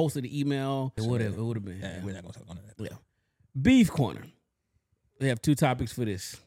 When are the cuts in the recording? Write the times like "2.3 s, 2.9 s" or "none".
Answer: 1.0 s